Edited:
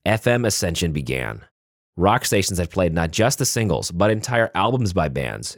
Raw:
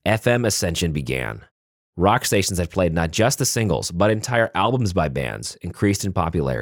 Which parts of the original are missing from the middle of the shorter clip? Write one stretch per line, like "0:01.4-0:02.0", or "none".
none

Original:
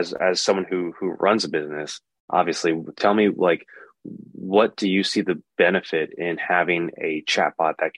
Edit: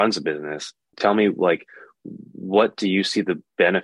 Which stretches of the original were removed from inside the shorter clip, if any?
0:02.2-0:02.9

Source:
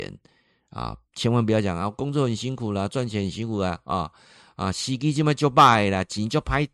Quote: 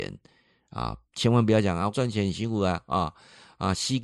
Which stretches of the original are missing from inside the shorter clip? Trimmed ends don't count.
0:01.9-0:02.9

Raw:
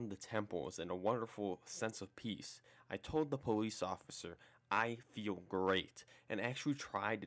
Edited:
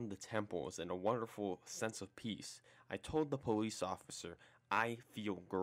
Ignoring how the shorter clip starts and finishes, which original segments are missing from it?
none

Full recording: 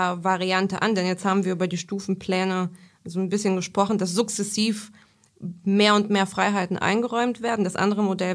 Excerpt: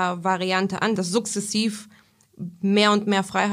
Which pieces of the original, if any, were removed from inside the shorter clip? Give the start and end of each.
0:01.0-0:04.0

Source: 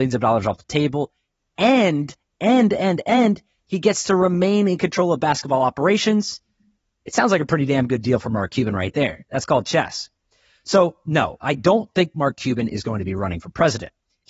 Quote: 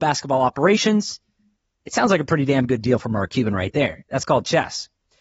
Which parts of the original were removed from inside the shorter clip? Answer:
none

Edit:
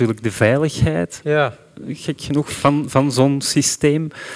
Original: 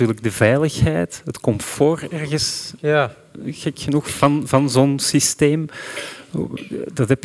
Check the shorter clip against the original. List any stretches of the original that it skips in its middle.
0:01.2-0:02.8

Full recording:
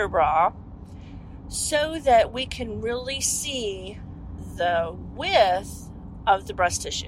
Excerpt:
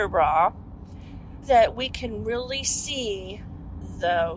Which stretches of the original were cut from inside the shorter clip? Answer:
0:01.4-0:02.0

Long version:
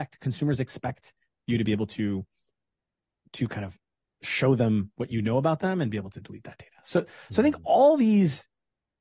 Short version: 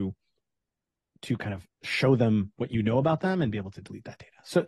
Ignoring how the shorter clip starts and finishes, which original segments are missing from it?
0:03.8-0:04.1

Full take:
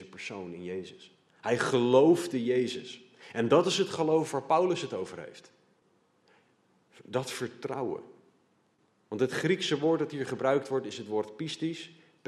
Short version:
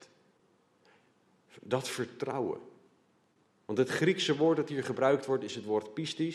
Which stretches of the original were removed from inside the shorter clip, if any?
none

